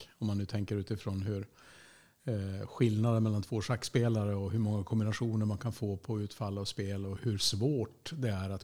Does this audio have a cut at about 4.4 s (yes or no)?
no